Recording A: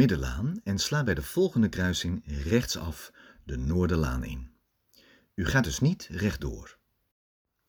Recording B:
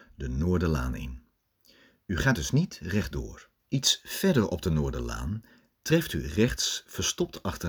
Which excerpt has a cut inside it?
B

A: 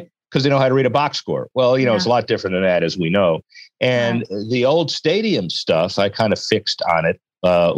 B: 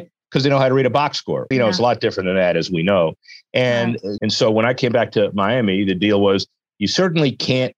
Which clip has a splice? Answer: B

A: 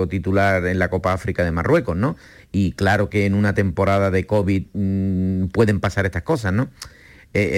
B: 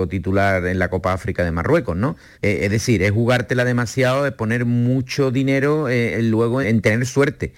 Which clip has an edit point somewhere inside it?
B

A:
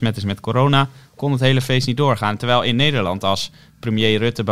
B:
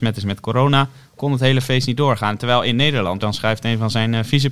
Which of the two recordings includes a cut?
B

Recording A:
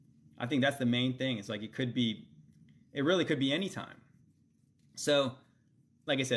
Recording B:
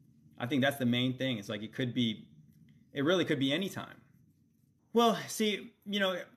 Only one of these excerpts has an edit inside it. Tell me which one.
B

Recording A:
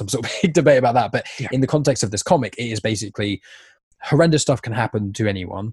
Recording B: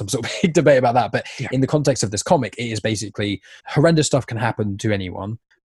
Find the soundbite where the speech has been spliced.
B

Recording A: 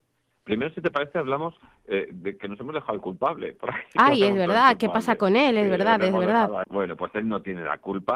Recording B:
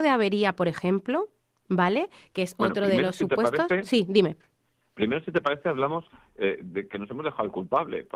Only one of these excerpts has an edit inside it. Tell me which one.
A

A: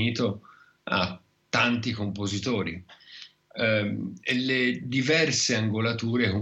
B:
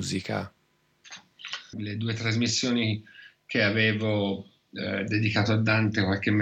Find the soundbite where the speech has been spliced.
B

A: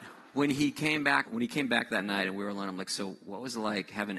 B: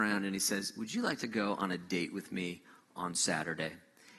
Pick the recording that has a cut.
A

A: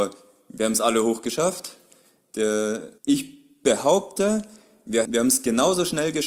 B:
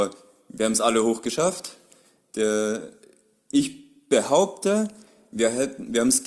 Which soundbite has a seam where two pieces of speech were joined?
A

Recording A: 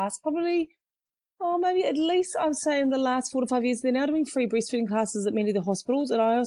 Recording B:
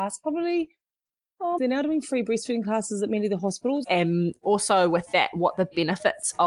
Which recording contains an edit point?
B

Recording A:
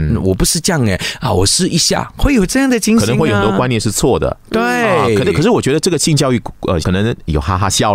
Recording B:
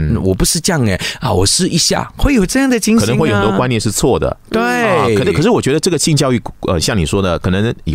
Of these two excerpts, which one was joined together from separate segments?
A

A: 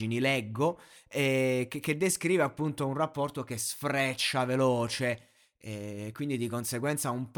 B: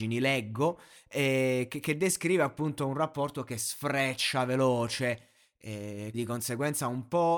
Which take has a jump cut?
B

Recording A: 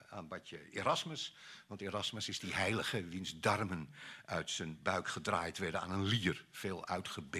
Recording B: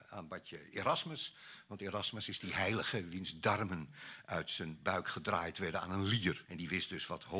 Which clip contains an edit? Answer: B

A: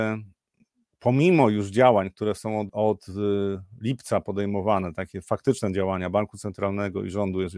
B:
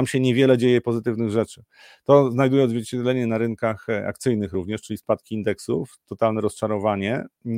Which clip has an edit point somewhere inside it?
A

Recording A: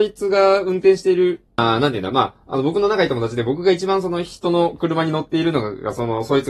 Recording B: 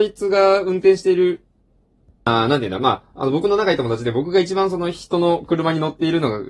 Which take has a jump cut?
A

